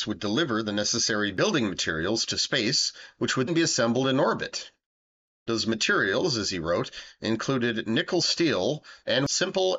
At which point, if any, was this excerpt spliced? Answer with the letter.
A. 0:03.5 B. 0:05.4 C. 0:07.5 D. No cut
A